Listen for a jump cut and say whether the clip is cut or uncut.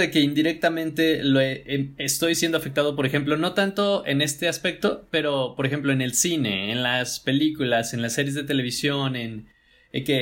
uncut